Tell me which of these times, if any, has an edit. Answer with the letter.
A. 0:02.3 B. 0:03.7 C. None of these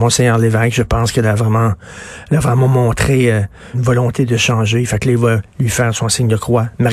B